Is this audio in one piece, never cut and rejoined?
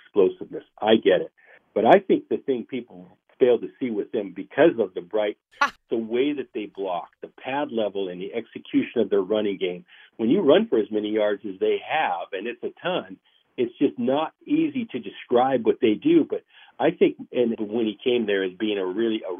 no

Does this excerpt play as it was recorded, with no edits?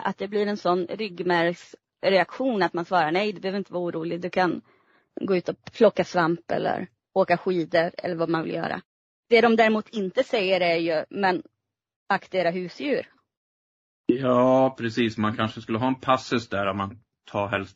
yes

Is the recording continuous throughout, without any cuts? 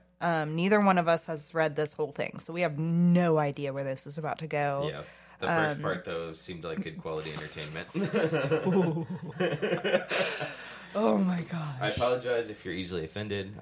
yes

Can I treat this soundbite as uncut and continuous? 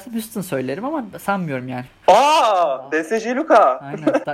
no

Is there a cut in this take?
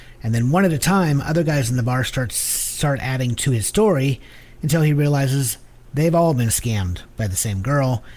no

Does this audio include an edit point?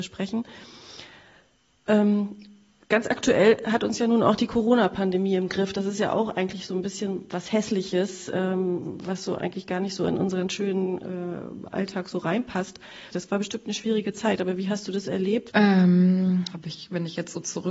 yes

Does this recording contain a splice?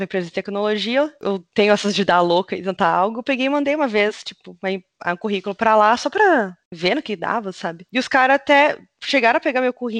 yes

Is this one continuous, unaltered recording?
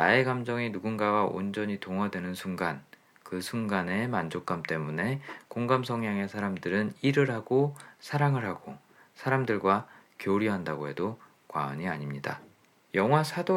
yes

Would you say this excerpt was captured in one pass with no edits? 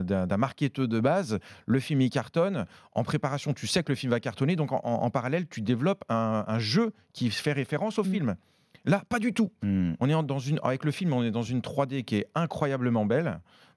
yes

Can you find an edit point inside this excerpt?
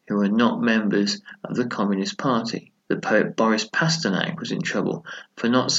yes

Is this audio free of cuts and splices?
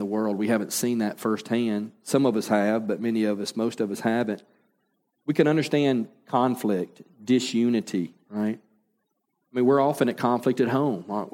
yes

